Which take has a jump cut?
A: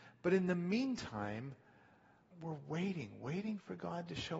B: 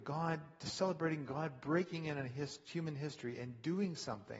A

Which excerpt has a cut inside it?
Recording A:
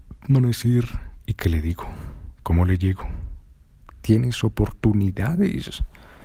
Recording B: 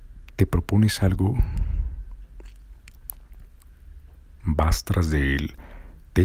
A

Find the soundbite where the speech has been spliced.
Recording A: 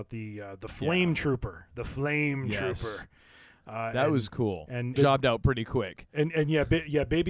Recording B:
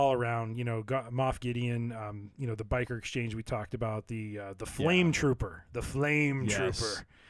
A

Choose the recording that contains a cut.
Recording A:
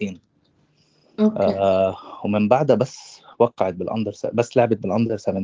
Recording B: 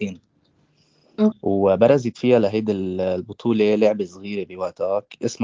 B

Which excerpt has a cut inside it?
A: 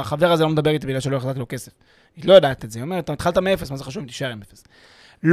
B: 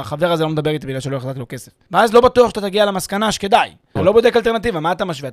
B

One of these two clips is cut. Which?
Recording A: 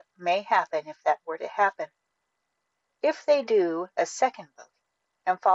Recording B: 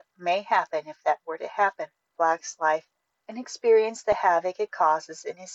B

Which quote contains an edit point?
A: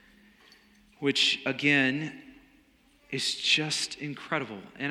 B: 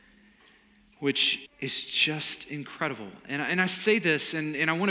B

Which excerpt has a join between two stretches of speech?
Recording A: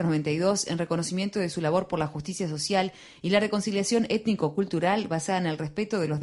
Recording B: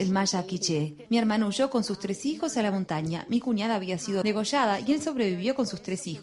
B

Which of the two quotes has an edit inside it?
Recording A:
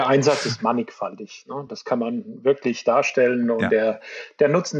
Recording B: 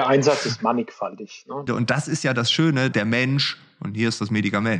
B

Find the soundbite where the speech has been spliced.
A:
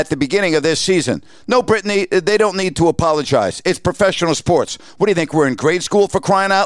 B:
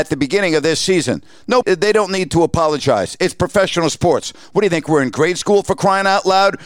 B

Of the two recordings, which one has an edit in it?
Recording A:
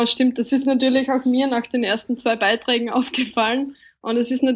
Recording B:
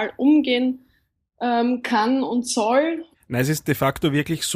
B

